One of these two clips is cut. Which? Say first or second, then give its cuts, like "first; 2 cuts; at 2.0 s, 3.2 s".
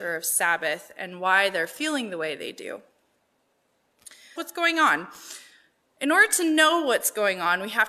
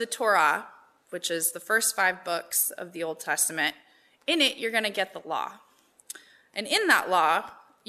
first; 1 cut; at 4.4 s